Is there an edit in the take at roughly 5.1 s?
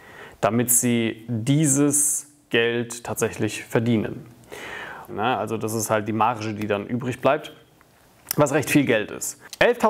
yes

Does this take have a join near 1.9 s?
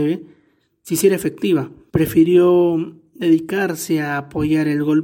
yes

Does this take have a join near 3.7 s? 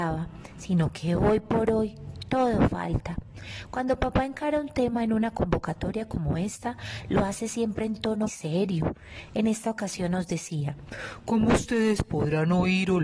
no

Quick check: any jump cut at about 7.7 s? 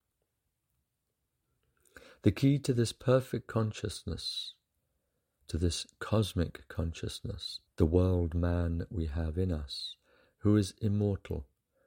yes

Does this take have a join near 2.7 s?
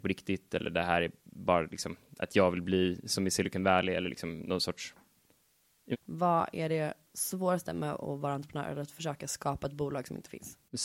no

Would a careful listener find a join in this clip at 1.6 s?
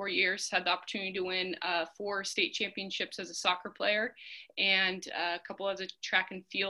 no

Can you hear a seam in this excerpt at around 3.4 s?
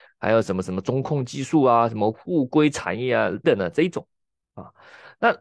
yes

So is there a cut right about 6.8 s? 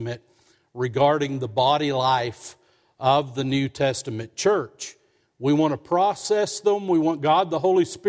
no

